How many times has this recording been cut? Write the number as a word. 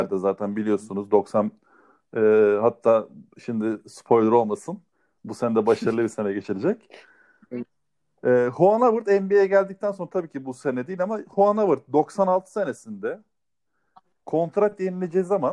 zero